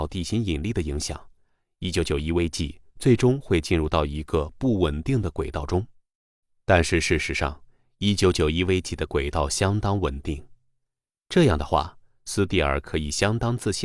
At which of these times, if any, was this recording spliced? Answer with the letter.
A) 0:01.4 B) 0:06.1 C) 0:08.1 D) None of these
D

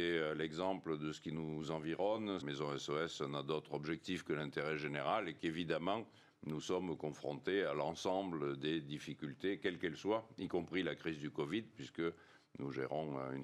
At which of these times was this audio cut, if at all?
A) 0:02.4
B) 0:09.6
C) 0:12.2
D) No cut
A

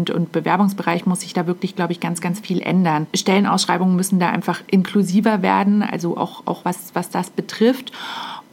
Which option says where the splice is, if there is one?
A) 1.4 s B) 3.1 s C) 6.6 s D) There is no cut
D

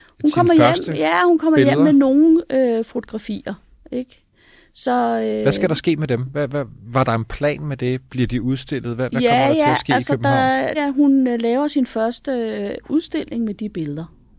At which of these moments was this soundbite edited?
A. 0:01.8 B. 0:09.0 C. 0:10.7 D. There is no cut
C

